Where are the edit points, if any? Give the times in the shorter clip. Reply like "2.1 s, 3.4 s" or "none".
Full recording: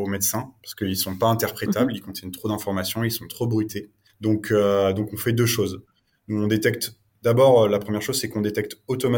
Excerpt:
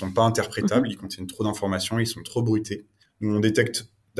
3.0 s